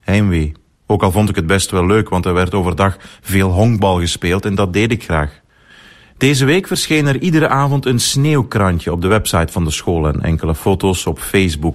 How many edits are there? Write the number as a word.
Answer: zero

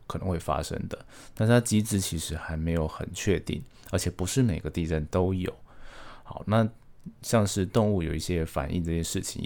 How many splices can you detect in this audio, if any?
zero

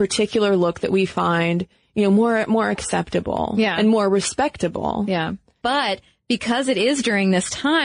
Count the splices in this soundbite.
one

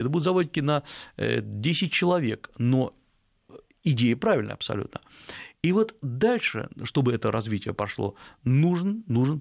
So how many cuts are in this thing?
zero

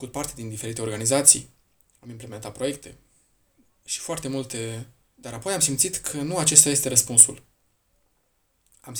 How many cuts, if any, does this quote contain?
one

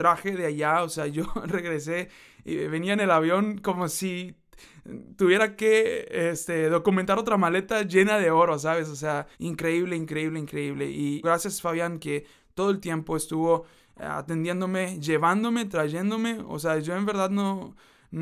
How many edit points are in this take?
two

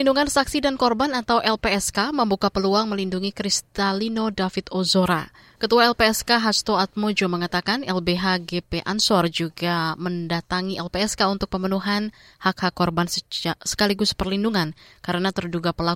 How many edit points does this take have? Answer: one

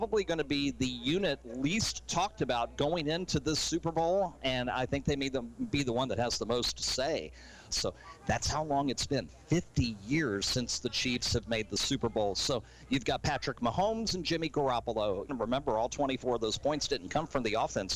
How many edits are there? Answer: two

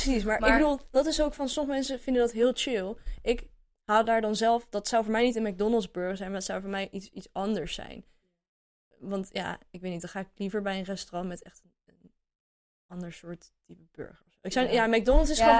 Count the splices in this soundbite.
zero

